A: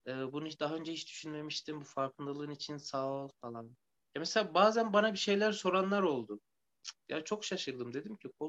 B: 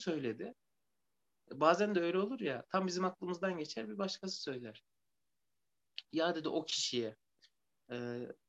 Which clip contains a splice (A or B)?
A